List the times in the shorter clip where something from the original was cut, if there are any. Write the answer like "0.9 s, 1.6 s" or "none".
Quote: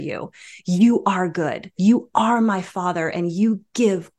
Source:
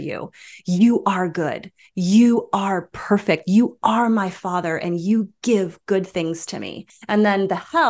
1.8 s